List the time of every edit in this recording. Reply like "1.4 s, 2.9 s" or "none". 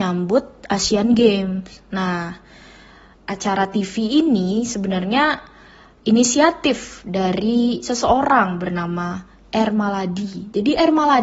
3.1 s